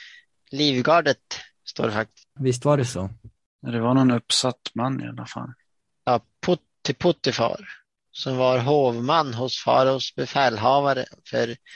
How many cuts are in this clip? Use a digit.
2